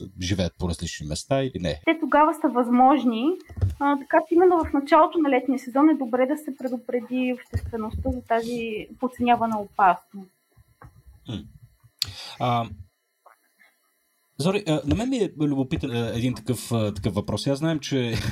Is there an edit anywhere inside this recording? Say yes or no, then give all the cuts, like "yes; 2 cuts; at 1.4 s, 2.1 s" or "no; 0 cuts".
yes; 2 cuts; at 1.8 s, 15.9 s